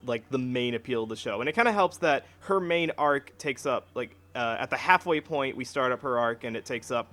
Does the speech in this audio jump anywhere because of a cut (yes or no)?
no